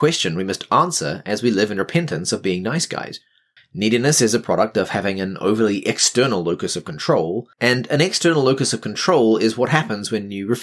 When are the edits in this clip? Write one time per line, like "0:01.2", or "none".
0:03.6
0:07.5